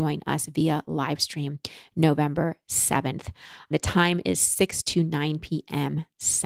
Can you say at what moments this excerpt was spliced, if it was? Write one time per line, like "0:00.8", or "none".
none